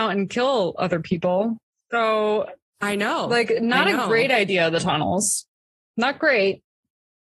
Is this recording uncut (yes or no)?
yes